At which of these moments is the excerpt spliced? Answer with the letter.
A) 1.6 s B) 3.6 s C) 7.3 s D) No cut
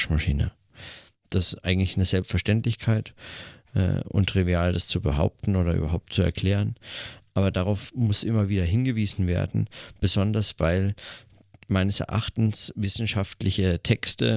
D